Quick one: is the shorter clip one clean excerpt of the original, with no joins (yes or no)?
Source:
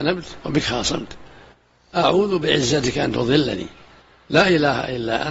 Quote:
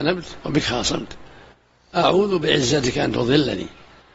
yes